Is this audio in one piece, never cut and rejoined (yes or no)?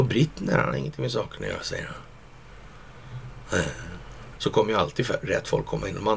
no